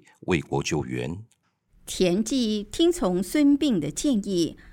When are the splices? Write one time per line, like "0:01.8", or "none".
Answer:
0:01.7